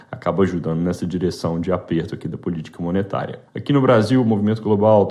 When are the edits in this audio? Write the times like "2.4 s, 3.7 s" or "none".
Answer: 3.5 s